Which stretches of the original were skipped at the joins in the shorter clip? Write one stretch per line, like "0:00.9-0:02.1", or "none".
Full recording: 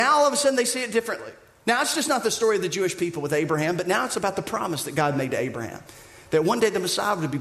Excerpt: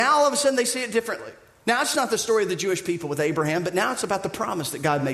0:01.9-0:02.1